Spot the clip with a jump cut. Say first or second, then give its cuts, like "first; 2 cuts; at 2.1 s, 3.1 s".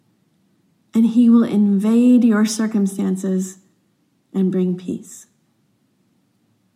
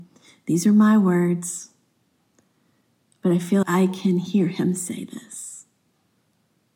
second; 1 cut; at 3.6 s